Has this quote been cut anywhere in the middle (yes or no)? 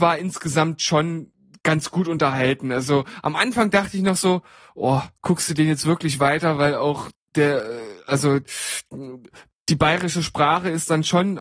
no